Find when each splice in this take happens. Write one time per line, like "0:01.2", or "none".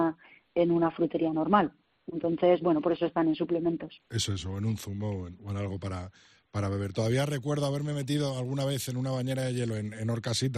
none